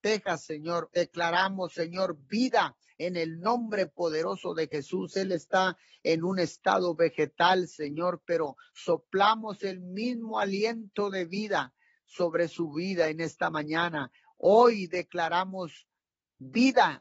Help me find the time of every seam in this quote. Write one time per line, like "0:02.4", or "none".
0:00.9